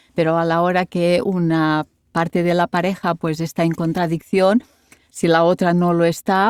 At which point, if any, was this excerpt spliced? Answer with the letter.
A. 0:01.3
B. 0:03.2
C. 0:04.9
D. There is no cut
D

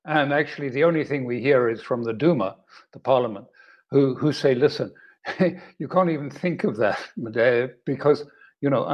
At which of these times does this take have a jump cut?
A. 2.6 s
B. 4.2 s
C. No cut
C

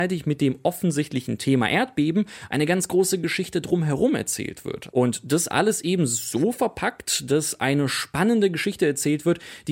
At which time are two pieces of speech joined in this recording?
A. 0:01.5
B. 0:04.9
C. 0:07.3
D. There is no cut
B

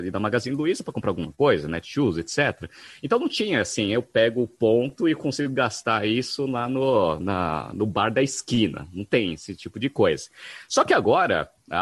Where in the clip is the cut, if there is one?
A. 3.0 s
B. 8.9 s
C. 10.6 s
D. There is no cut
D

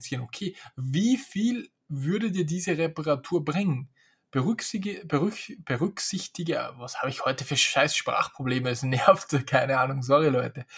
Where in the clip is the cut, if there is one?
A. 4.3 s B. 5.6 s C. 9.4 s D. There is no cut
D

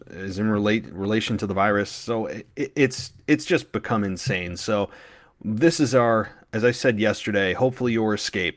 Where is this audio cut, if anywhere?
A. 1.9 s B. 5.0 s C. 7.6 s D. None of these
D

